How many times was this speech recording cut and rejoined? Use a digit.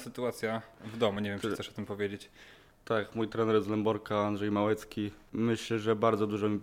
0